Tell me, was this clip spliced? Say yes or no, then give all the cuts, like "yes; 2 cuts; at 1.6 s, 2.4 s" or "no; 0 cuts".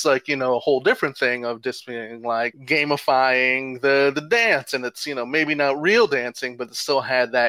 no; 0 cuts